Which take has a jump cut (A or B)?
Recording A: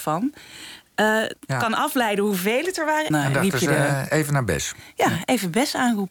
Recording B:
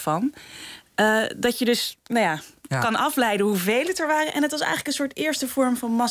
A